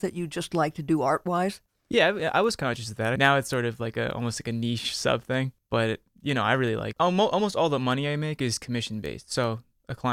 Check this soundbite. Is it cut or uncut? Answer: cut